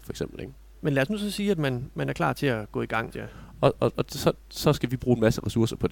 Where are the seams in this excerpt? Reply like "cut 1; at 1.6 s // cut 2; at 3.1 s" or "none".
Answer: cut 1; at 3.1 s